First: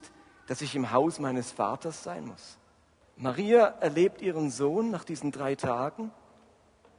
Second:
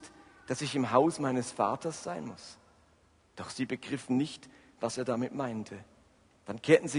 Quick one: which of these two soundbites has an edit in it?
first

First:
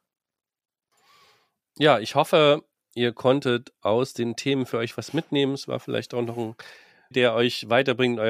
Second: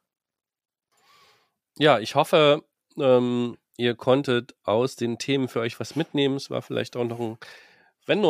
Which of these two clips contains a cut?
first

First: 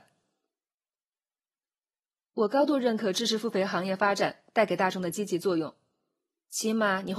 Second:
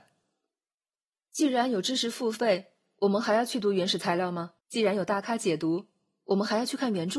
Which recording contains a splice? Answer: second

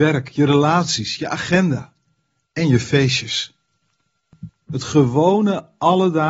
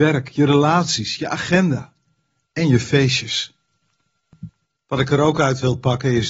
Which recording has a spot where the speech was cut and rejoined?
first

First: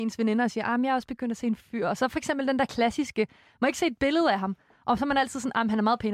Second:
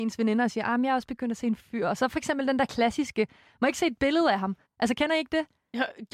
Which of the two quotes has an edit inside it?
second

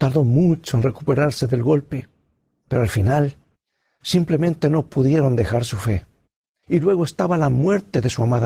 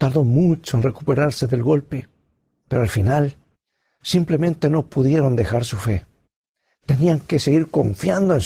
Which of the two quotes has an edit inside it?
first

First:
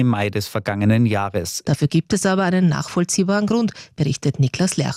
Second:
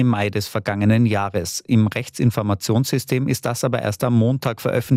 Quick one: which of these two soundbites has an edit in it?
first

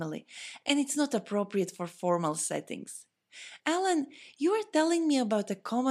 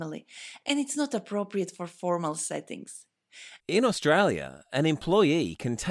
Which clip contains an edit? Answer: second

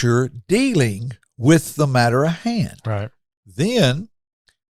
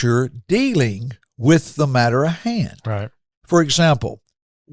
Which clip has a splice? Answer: first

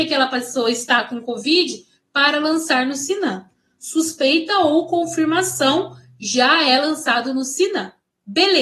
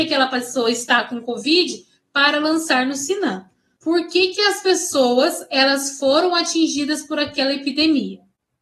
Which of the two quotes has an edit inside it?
second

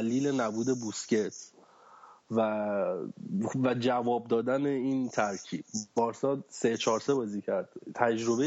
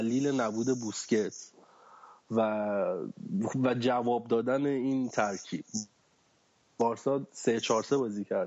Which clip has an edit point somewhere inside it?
first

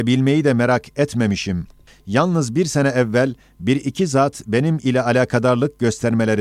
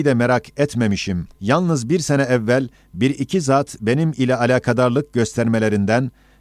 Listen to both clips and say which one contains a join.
second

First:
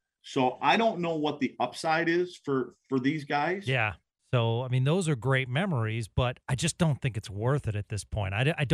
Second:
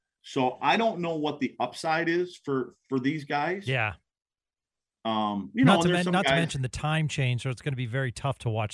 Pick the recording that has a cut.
first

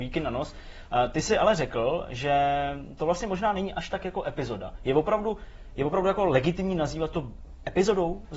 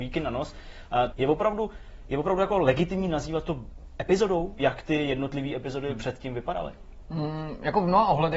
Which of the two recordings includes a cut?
second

